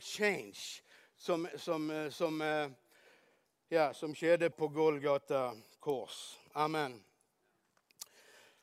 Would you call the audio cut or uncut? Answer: cut